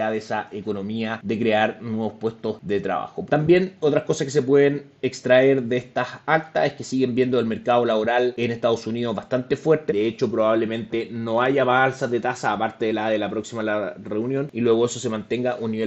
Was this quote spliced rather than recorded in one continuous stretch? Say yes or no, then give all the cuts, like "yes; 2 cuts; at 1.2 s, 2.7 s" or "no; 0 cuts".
yes; 2 cuts; at 3.3 s, 9.9 s